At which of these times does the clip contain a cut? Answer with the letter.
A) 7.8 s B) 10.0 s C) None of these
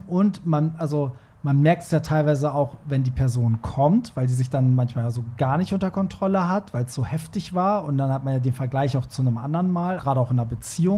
B